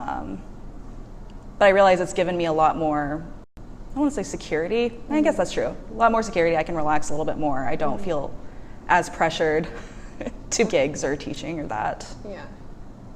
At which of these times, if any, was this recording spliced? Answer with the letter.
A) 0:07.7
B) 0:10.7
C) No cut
B